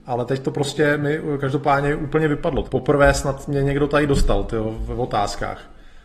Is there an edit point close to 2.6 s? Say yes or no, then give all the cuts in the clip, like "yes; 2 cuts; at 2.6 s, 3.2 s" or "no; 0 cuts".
yes; 1 cut; at 2.6 s